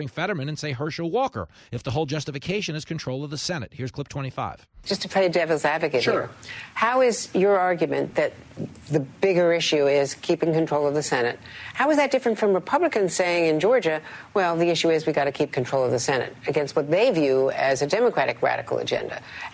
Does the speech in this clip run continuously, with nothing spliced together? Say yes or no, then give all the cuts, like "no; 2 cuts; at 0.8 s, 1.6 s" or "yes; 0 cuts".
yes; 0 cuts